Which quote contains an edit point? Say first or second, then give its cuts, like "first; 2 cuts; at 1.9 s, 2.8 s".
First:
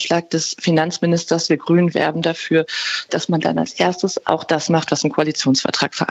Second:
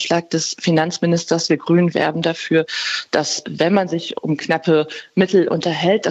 first; 1 cut; at 3.1 s